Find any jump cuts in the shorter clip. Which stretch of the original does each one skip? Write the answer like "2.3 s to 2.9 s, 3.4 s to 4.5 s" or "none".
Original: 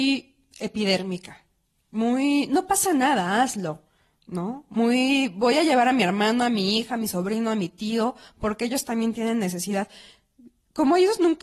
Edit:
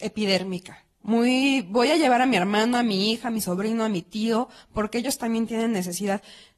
1.6 s to 4.7 s